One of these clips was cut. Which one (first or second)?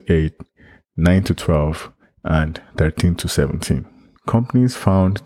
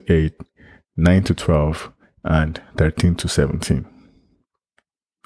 first